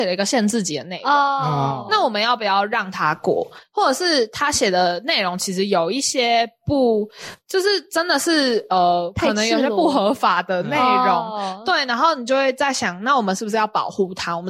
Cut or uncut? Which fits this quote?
uncut